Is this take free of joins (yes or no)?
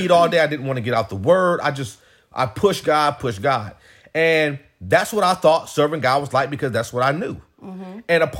no